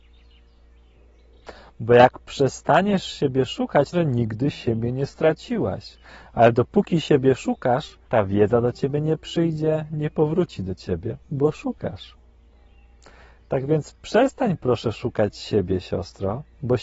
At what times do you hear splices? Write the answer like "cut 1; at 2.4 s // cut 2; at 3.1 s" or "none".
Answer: cut 1; at 3.9 s // cut 2; at 8.0 s